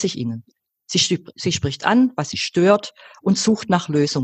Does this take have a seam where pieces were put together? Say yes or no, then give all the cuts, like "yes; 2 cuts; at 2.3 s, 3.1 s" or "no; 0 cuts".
no; 0 cuts